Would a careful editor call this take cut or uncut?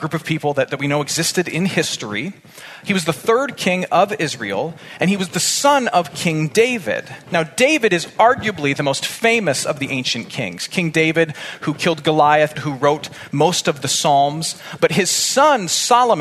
cut